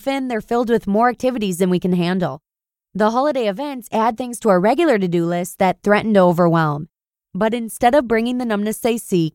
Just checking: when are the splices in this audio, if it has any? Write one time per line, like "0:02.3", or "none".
0:07.1